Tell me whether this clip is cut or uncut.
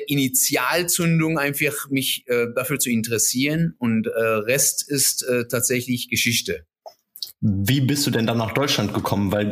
uncut